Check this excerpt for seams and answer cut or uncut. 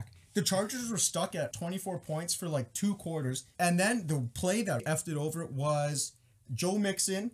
cut